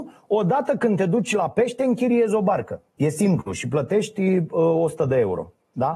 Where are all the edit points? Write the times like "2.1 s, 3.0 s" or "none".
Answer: 2.9 s